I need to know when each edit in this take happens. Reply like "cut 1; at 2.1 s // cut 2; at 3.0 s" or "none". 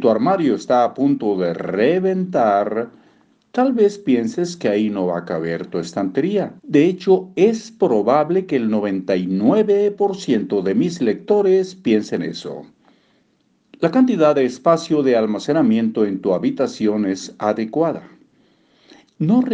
cut 1; at 6.6 s // cut 2; at 13.7 s